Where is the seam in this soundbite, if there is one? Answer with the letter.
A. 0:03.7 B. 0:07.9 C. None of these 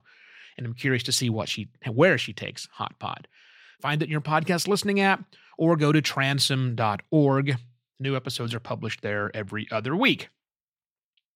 A